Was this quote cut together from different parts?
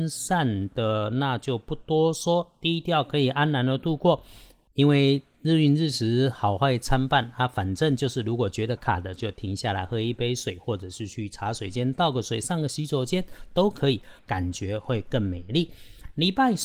yes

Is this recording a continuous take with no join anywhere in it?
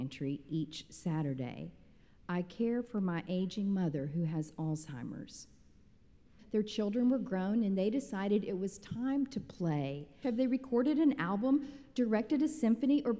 no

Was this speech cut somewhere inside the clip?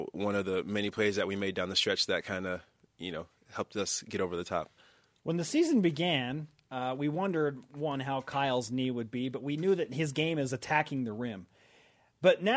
no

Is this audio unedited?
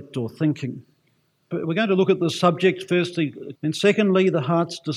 no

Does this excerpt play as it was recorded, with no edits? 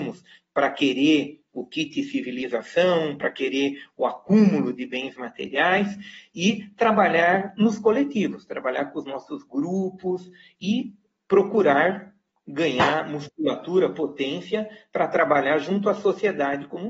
yes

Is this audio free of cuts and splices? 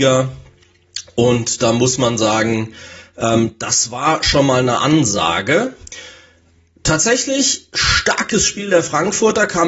yes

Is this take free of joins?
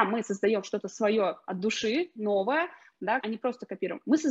no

